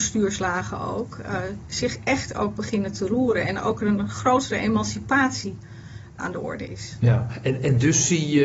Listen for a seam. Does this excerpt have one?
no; 0 cuts

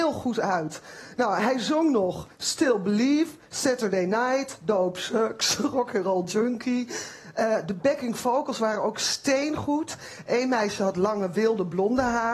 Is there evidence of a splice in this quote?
no; 0 cuts

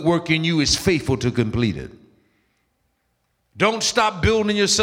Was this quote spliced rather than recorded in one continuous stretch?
no; 0 cuts

